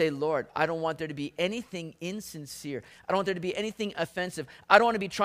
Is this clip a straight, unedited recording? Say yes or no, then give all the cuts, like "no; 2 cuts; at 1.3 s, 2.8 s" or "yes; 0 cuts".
yes; 0 cuts